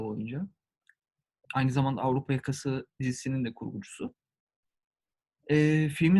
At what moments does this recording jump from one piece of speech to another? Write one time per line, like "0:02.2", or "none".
0:01.4